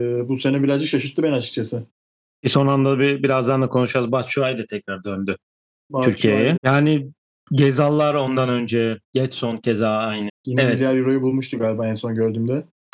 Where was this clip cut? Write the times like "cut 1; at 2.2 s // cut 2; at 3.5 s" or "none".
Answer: cut 1; at 6.6 s // cut 2; at 10.3 s